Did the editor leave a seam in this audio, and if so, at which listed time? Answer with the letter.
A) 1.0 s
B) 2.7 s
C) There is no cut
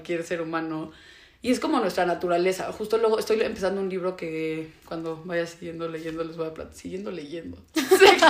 C